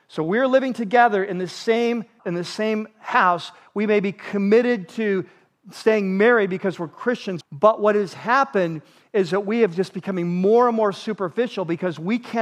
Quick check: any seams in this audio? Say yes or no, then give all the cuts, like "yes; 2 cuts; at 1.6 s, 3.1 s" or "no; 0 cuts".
yes; 2 cuts; at 2.2 s, 7.4 s